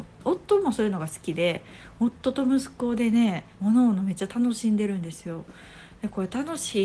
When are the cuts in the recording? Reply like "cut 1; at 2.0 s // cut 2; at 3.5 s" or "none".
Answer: cut 1; at 3.5 s